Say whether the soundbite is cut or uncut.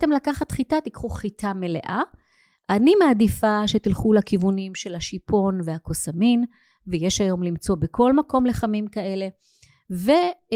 uncut